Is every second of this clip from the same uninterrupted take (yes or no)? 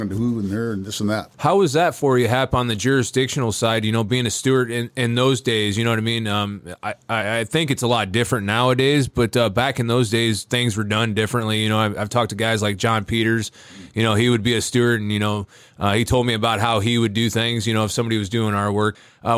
yes